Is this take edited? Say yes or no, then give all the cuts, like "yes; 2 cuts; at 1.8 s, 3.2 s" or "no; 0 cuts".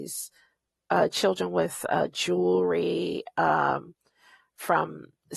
no; 0 cuts